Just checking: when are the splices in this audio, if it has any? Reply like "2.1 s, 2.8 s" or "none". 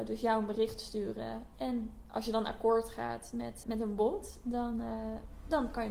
3.6 s